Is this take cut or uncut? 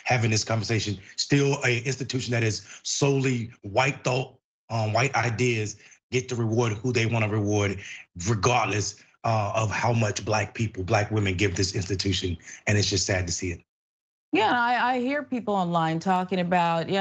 uncut